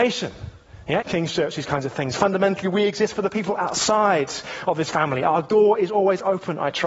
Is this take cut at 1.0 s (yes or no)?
yes